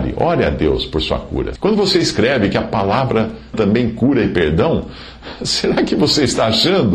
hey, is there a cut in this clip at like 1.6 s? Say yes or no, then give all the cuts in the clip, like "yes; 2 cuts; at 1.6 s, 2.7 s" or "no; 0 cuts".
yes; 2 cuts; at 1.6 s, 3.5 s